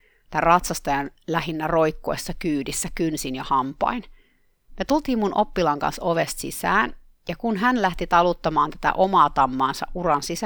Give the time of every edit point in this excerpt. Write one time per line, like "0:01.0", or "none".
none